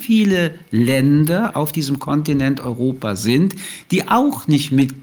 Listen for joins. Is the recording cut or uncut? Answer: cut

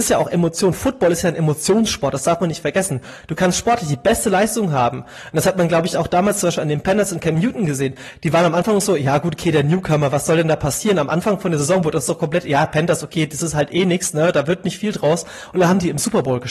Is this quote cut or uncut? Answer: uncut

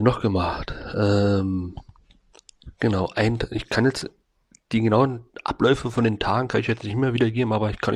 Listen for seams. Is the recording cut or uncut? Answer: uncut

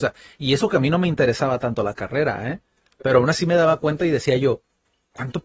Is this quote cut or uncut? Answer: uncut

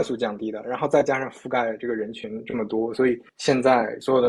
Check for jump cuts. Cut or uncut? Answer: cut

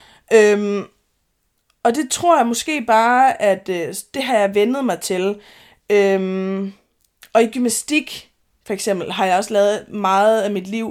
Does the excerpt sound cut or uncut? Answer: uncut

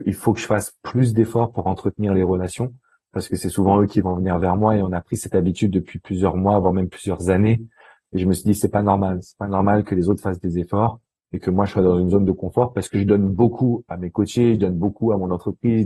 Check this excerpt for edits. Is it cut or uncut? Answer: uncut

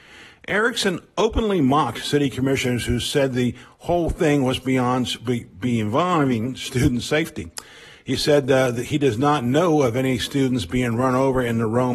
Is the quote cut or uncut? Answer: uncut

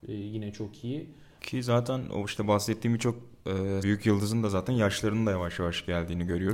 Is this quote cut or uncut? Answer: cut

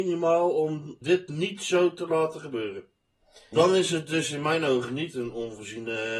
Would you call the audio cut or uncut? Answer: cut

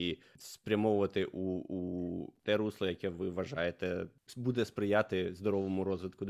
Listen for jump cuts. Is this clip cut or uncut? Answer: uncut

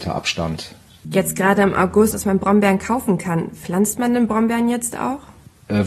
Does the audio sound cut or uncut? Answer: cut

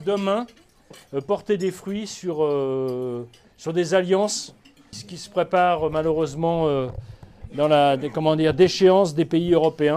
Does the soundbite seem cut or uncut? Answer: cut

